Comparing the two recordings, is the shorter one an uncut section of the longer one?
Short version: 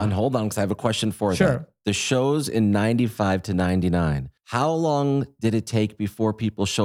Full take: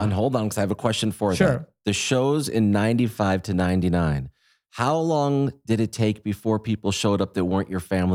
no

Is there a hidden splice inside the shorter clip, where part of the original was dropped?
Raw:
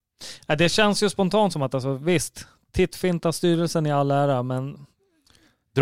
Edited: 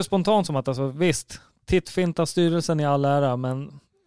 no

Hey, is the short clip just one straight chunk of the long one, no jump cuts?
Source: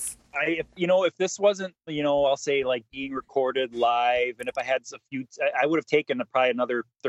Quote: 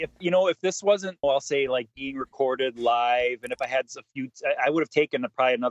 no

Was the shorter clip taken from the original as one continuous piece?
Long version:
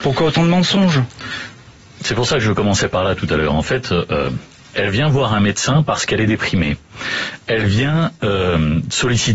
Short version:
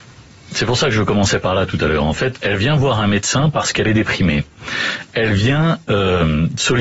no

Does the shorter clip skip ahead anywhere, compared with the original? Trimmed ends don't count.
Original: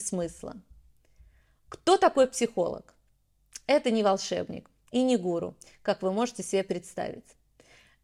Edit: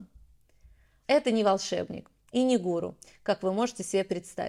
yes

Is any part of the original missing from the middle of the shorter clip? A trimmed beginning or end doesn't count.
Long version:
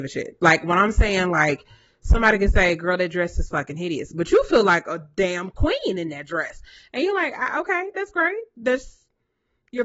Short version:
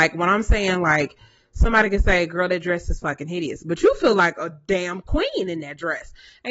no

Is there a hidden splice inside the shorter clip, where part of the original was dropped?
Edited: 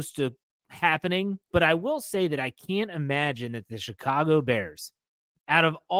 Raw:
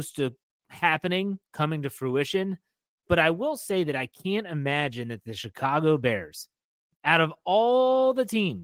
yes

